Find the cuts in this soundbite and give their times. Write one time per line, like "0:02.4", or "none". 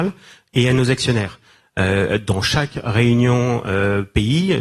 none